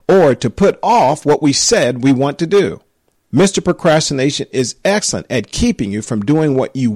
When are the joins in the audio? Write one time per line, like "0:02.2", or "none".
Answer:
0:03.2